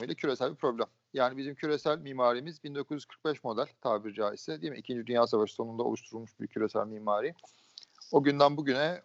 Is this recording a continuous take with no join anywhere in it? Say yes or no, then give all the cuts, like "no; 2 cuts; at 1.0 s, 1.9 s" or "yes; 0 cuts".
yes; 0 cuts